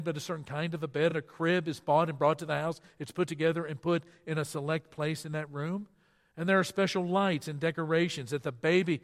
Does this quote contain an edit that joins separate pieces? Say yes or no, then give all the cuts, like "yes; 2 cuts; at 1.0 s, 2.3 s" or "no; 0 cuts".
no; 0 cuts